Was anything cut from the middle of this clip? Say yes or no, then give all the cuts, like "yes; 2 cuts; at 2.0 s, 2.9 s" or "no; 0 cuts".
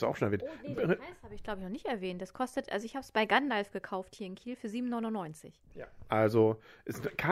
no; 0 cuts